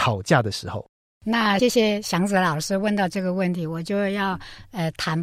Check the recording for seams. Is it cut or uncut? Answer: cut